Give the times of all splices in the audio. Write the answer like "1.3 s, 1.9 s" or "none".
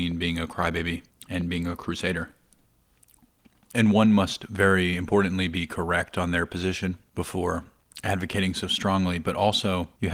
none